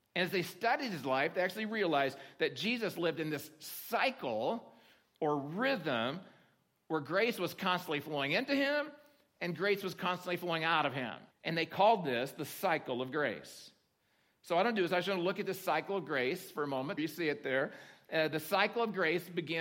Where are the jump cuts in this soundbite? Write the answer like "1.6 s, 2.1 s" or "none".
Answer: 11.3 s, 17.0 s